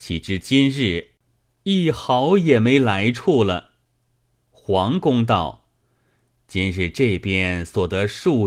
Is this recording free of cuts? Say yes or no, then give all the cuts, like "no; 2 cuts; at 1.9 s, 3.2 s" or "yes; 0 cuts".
yes; 0 cuts